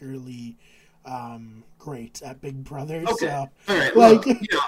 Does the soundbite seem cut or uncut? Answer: uncut